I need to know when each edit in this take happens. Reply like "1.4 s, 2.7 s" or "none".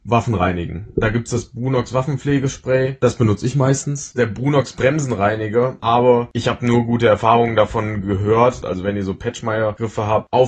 5.8 s, 8.6 s